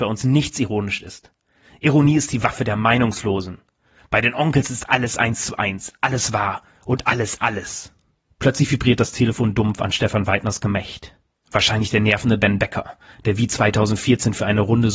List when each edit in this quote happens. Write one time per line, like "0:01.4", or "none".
0:08.2